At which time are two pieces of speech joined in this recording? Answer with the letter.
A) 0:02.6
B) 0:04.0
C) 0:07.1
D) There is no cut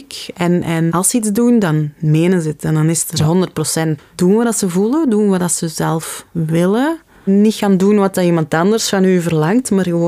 B